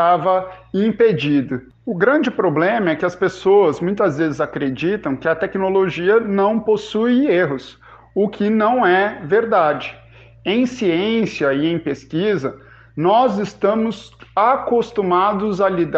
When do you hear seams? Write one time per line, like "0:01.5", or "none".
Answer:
0:01.7